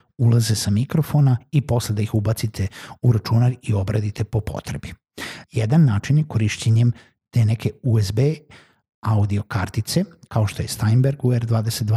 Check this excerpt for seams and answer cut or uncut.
cut